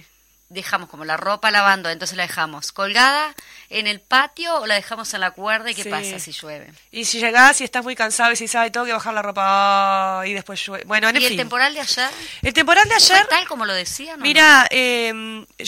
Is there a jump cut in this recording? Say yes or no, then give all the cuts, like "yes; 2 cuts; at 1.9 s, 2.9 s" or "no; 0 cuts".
no; 0 cuts